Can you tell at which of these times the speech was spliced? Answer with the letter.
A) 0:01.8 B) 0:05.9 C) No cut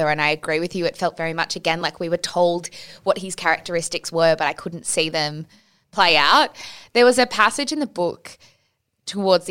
C